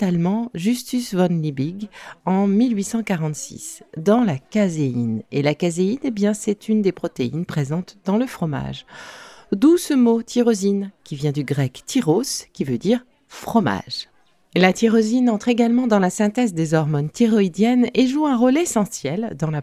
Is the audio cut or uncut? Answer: uncut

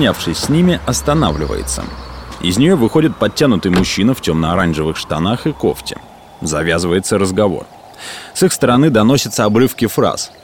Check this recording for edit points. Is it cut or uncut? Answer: uncut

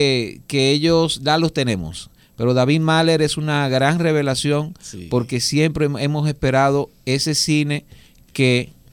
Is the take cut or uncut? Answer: uncut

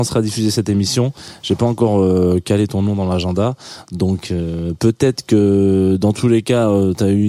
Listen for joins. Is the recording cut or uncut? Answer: uncut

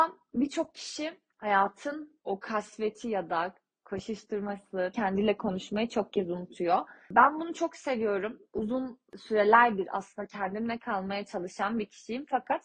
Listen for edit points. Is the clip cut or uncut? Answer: cut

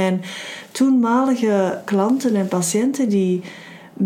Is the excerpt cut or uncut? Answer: cut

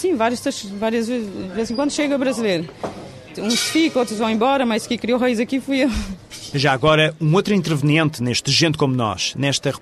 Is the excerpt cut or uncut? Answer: cut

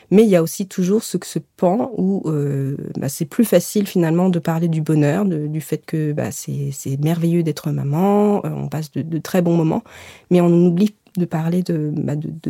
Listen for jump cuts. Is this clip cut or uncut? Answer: uncut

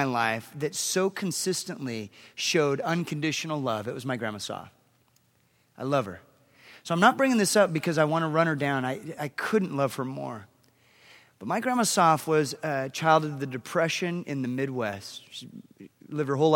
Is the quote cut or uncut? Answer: uncut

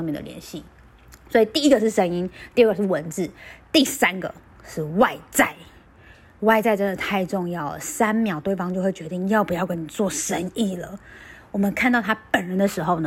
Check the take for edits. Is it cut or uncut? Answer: uncut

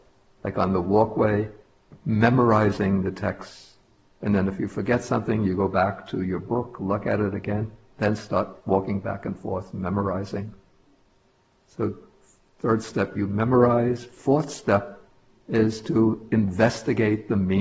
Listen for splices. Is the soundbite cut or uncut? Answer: uncut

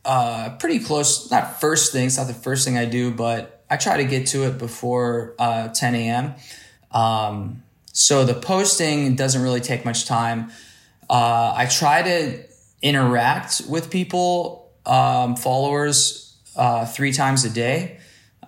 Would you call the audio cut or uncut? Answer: cut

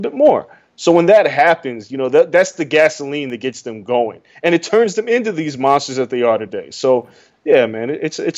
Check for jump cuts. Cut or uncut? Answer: uncut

